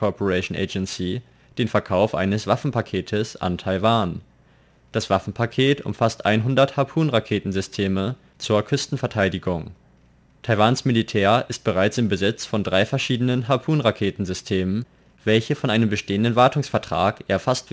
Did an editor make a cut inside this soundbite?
no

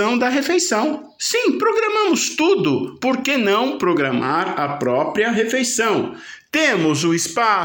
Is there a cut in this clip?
no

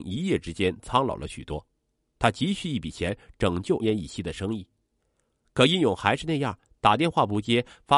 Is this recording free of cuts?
no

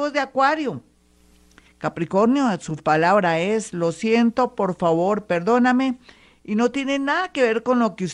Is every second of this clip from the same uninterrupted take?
no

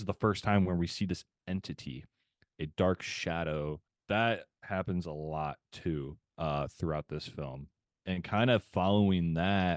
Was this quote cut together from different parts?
no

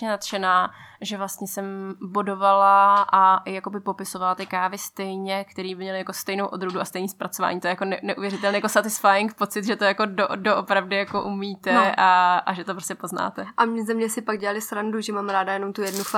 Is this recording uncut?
yes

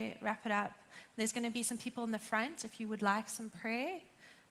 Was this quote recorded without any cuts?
yes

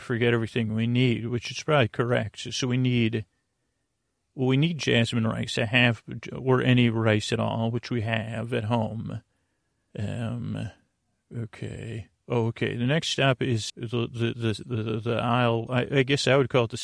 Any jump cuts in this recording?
yes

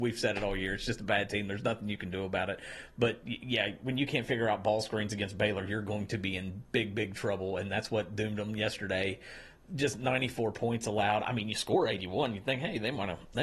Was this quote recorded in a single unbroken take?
yes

